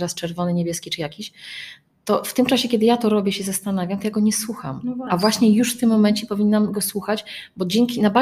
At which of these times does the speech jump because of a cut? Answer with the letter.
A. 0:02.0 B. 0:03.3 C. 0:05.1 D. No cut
D